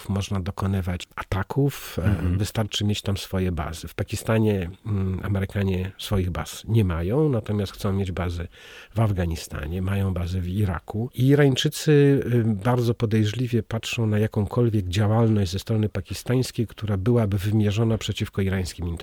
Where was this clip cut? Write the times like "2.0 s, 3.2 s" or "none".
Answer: 2.4 s